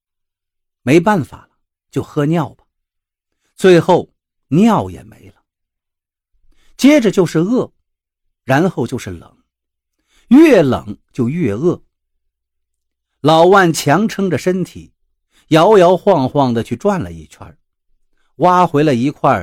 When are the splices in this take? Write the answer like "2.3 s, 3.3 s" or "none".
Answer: none